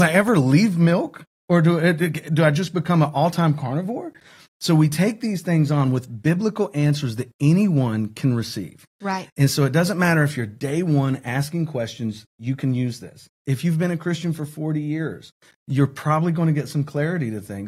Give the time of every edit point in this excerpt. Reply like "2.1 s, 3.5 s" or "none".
none